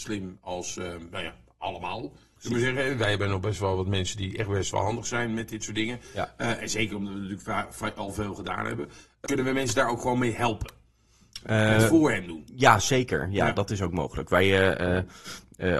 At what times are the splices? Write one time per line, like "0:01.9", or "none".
0:09.3